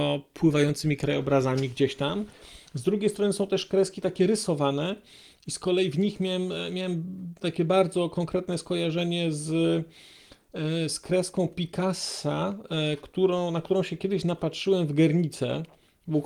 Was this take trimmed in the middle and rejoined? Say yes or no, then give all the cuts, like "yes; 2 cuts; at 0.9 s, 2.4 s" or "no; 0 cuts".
no; 0 cuts